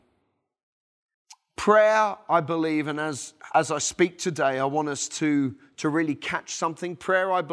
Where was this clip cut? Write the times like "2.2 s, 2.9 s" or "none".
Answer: none